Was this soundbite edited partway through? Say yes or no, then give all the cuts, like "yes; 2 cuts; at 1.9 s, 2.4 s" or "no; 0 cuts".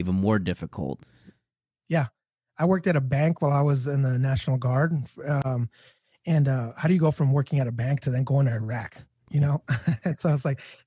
no; 0 cuts